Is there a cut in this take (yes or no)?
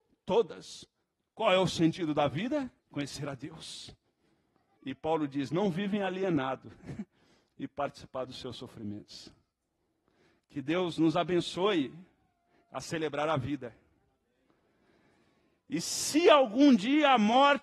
yes